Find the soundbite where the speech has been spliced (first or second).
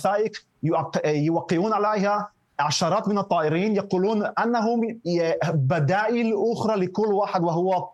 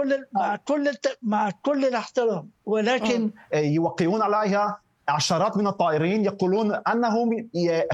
second